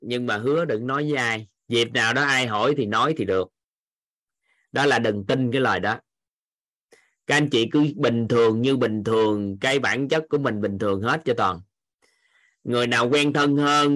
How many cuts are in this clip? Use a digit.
1